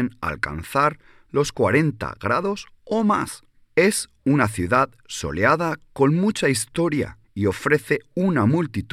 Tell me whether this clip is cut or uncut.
cut